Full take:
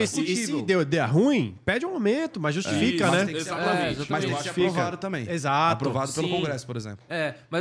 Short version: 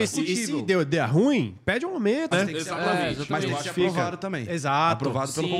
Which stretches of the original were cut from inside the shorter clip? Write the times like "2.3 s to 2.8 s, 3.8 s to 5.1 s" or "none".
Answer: 2.3 s to 3.1 s